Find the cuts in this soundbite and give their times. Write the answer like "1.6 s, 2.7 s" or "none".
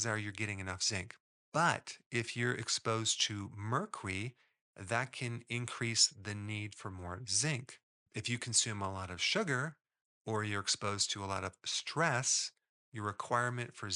none